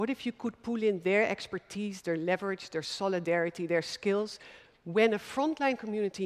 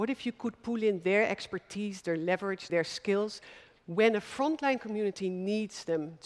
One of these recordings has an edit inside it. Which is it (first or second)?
second